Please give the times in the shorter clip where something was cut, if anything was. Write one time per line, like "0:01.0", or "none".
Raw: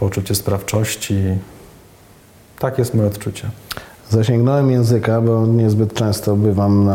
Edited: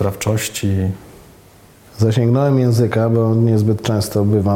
0:01.8